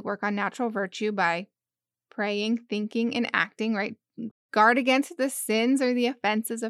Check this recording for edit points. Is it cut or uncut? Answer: cut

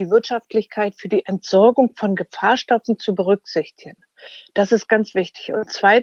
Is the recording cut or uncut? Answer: uncut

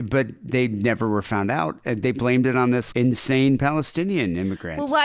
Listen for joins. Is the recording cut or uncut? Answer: cut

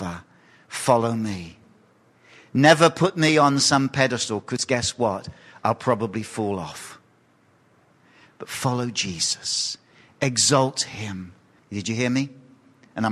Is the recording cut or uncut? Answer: cut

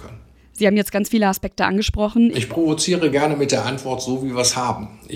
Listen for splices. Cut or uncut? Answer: cut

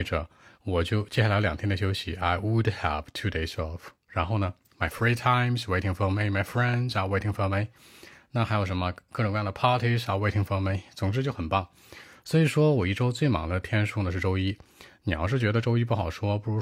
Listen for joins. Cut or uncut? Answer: uncut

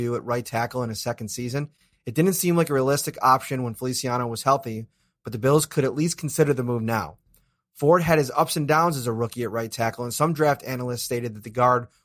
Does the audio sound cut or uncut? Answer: uncut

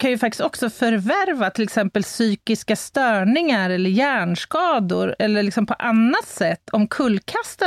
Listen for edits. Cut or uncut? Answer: uncut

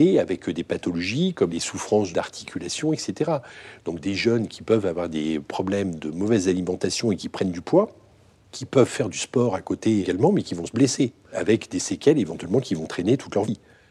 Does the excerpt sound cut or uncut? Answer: uncut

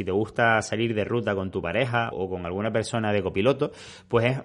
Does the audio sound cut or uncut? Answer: cut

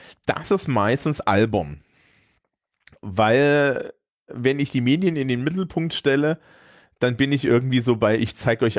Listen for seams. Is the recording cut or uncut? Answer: uncut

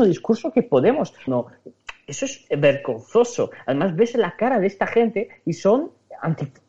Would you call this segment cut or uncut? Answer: cut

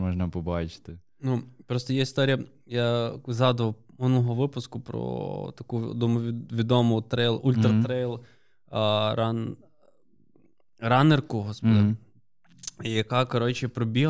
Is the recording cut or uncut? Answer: uncut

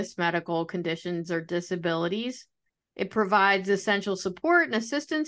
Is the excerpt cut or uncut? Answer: uncut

